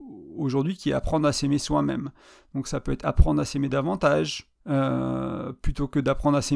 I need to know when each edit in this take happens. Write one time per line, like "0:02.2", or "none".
0:04.6